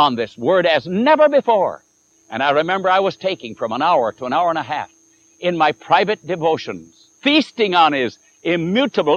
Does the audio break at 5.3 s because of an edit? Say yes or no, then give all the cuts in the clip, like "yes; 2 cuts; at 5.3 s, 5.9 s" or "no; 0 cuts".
no; 2 cuts; at 2.1 s, 7.1 s